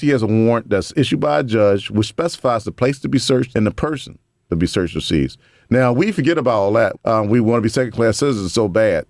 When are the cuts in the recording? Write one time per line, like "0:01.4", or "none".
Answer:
0:03.5
0:06.9